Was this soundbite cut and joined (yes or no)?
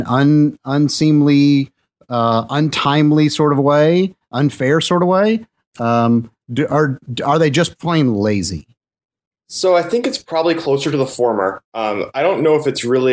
no